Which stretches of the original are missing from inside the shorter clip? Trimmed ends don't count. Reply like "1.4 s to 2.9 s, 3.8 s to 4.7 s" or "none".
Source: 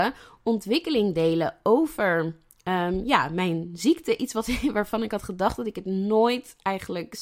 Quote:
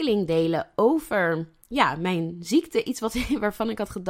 2.6 s to 3.0 s